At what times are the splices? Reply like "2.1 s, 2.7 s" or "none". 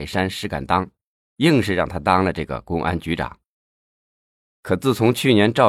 1.2 s